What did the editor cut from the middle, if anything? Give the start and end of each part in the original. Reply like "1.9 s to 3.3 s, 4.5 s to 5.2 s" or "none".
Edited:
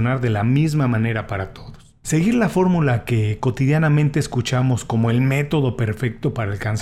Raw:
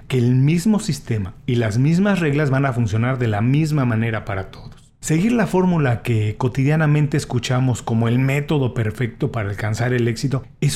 none